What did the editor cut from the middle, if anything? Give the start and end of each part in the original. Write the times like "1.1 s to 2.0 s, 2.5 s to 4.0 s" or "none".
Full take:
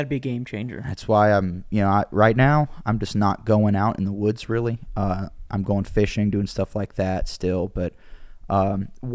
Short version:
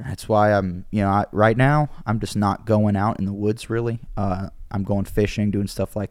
none

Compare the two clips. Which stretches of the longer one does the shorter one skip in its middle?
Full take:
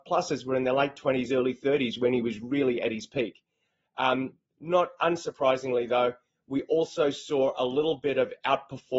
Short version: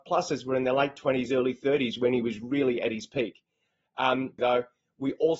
4.4 s to 5.9 s

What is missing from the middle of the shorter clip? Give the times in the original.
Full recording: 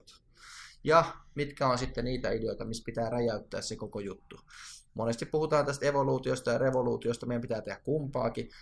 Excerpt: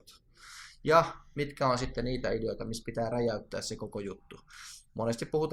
none

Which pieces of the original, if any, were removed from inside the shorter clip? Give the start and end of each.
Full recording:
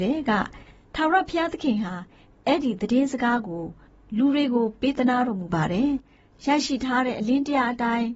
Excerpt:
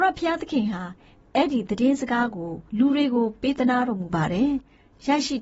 3.8 s to 4.1 s

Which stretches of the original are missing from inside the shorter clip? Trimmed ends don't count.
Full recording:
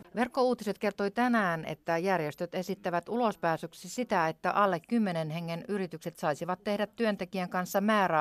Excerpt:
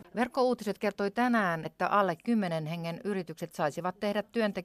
1.6 s to 4.3 s

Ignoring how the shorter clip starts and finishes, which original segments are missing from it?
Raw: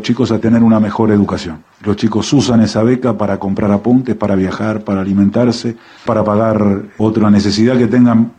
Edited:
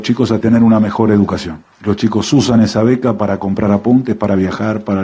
none

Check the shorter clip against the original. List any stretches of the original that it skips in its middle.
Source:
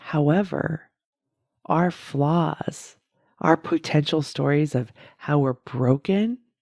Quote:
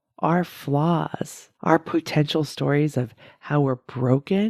3.0 s to 3.3 s

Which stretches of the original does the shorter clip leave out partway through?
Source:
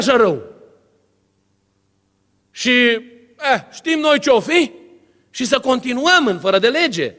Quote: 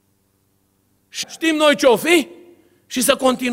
2.6 s to 3.7 s

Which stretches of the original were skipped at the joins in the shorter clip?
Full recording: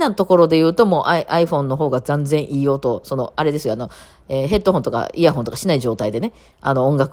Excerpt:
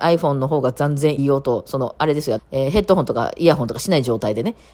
2.5 s to 2.6 s, 3.8 s to 4.1 s

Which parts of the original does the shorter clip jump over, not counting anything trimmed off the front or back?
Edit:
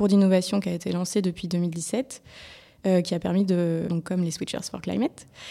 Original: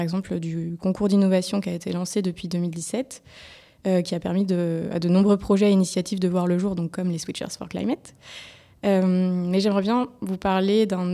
4.9 s to 6.8 s

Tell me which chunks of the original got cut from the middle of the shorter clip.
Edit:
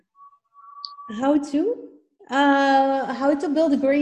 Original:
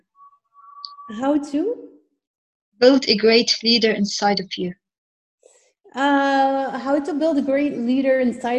2.1 s to 5.8 s

